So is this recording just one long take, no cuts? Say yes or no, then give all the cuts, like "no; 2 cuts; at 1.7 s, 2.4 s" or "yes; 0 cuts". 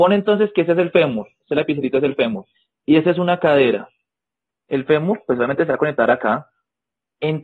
yes; 0 cuts